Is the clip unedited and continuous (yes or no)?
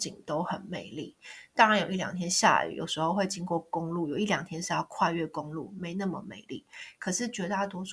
yes